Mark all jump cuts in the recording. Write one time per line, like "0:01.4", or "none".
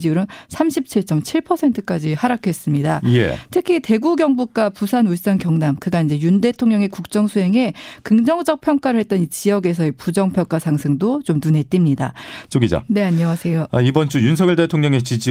0:12.5